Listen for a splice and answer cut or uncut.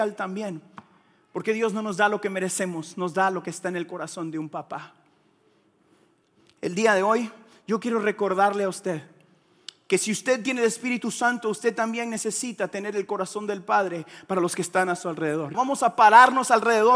cut